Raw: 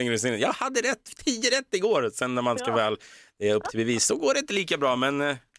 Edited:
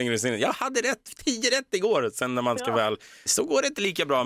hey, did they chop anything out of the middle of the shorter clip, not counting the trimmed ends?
yes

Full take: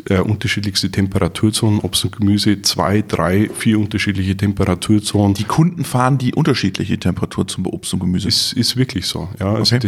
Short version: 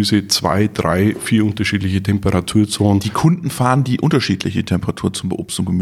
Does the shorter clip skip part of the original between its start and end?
no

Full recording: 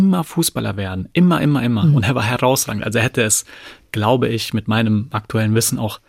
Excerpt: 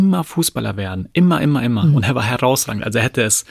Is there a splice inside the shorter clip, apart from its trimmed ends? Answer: no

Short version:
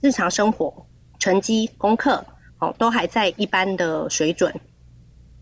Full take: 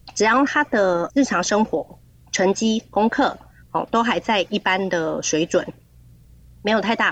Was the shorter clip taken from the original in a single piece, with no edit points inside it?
yes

